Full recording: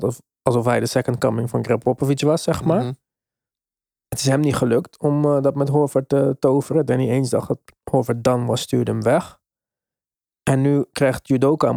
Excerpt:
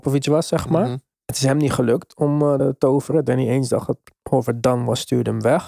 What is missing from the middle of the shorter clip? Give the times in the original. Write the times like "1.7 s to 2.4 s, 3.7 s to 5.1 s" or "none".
3.1 s to 4.0 s, 5.4 s to 6.2 s

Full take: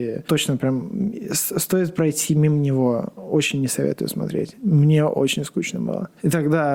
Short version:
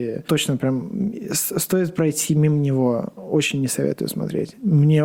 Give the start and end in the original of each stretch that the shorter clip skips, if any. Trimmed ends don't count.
none

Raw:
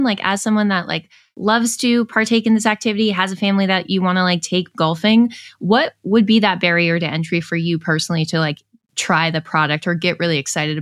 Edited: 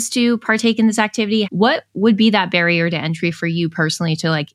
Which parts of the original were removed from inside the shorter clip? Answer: 3.1 s to 5.5 s

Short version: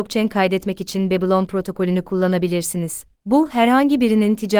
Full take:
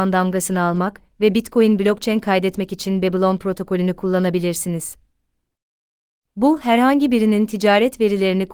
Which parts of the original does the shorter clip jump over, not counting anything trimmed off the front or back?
5.0 s to 6.2 s

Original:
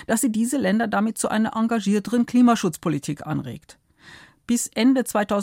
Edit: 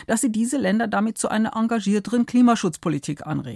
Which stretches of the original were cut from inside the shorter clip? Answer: none

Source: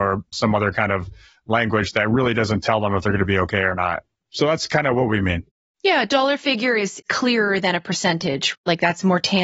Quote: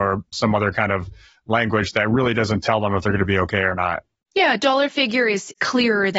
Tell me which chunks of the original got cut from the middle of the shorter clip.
4.2 s to 5.7 s

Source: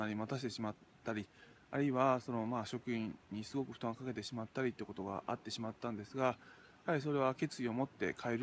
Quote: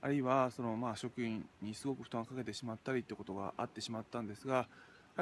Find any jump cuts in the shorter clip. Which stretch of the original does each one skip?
none

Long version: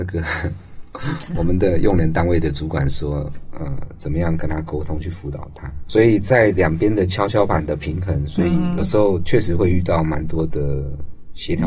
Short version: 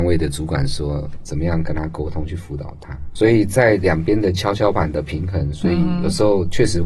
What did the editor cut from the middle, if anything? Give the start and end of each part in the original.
3.5 s to 4.0 s

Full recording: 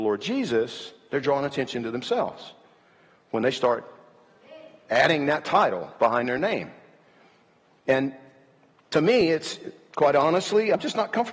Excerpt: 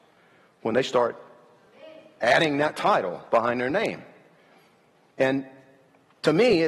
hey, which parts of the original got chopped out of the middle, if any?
none

